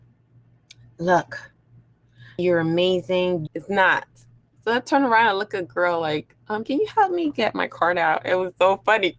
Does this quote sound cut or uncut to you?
cut